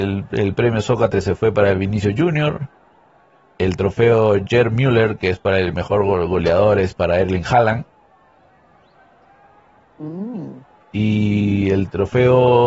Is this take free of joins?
yes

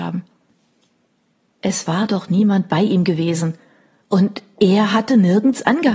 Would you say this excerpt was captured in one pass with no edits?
yes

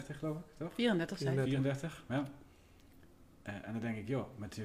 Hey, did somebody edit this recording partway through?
no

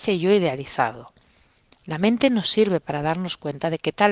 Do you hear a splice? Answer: no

